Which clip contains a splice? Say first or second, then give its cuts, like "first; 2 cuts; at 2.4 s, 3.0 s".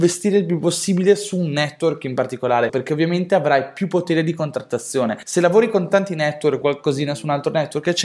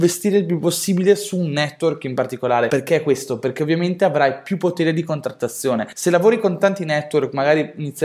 first; 2 cuts; at 2.7 s, 6.6 s